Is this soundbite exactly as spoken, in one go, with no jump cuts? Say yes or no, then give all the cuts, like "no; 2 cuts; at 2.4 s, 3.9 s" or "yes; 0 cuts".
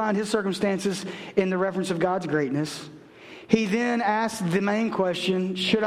yes; 0 cuts